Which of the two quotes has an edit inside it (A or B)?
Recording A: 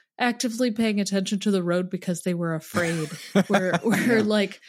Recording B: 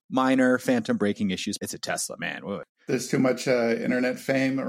B